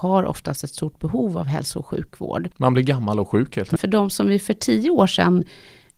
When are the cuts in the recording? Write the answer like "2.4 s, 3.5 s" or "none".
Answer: 3.8 s